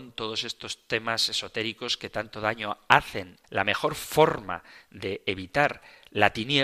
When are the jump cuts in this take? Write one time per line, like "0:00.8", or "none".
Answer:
0:03.4